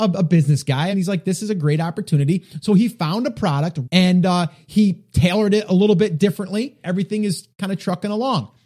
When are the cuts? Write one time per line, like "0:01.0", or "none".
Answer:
0:00.9
0:03.8
0:06.8